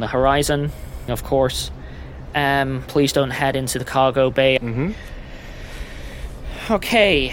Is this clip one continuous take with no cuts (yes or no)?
no